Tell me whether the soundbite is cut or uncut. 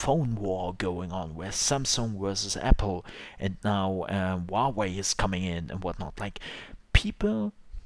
uncut